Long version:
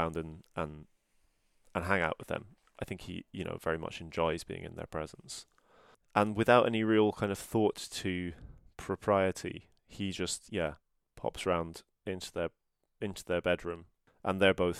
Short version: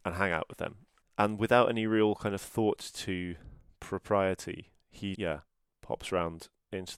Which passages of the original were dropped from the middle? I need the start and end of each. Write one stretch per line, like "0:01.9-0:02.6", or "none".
0:02.7-0:06.0
0:10.1-0:10.5

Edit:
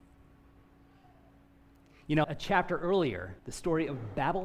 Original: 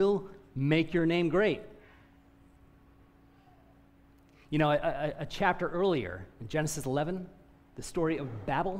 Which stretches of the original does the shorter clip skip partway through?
0:04.7-0:05.1
0:06.3-0:07.7

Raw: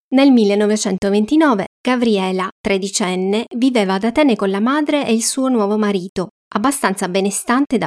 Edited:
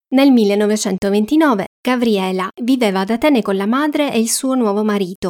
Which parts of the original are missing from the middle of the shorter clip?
0:02.5-0:03.5

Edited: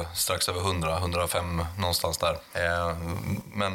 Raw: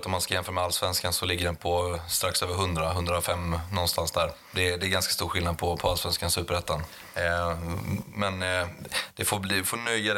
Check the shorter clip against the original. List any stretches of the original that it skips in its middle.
0:04.4-0:07.1

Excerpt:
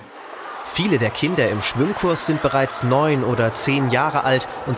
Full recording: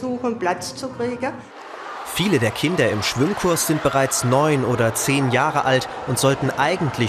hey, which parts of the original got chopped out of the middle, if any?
none

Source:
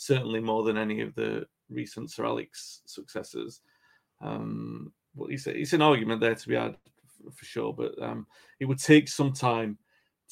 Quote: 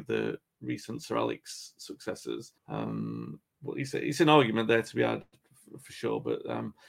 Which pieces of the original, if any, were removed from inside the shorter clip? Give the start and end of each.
0:03.7-0:04.1

